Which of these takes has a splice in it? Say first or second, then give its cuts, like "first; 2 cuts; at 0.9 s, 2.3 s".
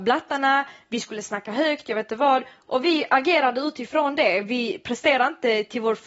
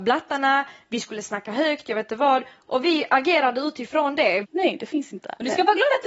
second; 1 cut; at 4.4 s